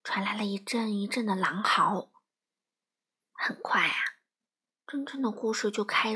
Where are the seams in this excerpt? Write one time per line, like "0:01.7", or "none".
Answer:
0:03.2